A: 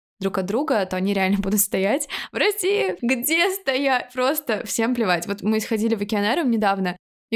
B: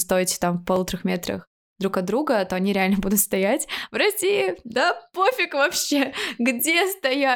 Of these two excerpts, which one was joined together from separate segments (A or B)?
A